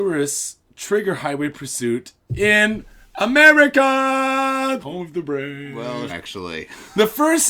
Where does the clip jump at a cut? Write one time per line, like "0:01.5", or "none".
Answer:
0:04.8
0:06.1